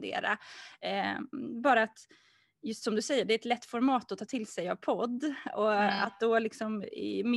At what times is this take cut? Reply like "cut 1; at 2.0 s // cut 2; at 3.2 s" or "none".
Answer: none